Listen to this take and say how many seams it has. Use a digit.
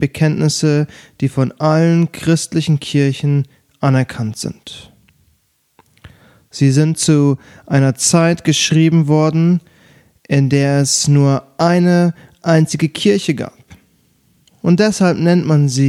0